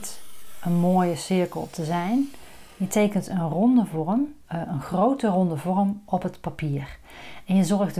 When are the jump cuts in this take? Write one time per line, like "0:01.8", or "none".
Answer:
0:04.4